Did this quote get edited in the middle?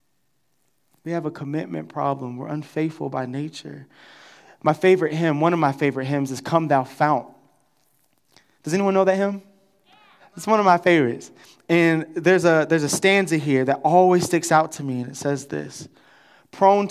no; 0 cuts

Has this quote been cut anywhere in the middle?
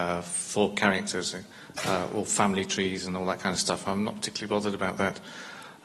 no; 0 cuts

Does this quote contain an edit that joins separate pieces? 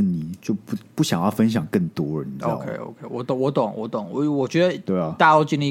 no; 0 cuts

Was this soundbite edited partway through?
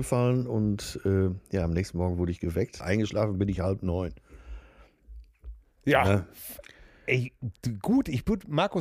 yes; 1 cut; at 2.8 s

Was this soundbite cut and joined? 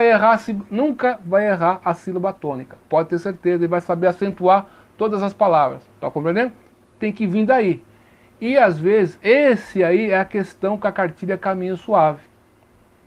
no; 0 cuts

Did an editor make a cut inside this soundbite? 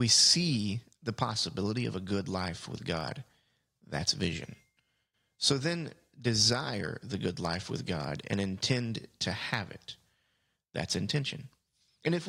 no; 0 cuts

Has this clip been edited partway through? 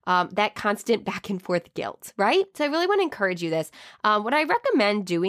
no; 0 cuts

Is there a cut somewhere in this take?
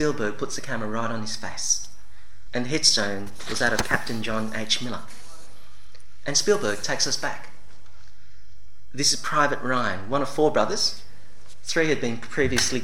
yes; 1 cut; at 2.5 s

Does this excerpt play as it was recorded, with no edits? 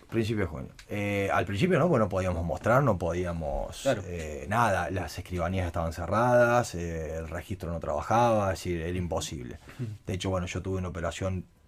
yes; 0 cuts

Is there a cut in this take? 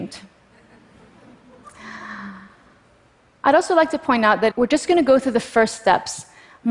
yes; 1 cut; at 4.5 s

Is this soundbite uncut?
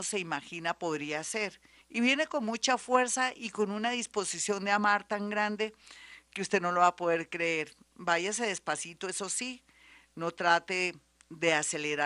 yes; 0 cuts

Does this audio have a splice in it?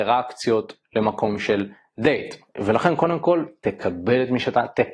yes; 1 cut; at 2.5 s

